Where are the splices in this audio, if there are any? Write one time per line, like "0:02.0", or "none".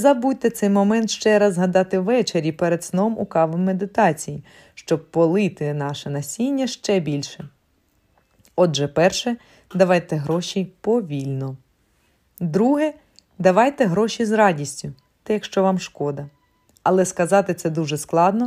0:15.3
0:16.7